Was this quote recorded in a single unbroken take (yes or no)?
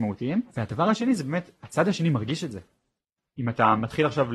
no